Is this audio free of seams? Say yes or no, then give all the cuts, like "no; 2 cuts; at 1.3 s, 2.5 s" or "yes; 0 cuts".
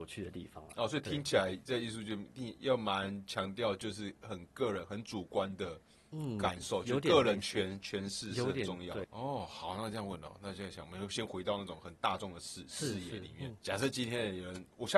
no; 2 cuts; at 9.0 s, 13.6 s